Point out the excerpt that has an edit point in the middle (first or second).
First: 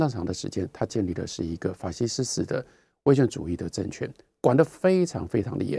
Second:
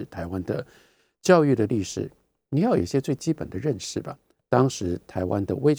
second